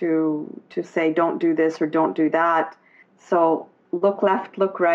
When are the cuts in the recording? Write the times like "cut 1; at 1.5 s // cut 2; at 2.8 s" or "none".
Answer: cut 1; at 3.0 s